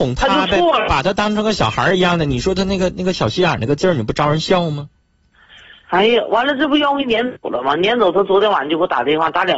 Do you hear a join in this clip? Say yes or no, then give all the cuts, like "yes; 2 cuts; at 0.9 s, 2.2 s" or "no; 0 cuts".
no; 0 cuts